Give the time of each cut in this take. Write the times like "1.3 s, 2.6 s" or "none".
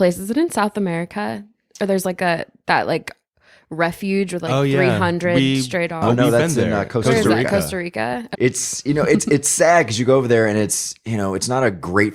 8.3 s